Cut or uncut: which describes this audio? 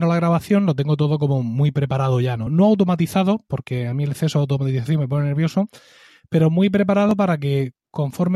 uncut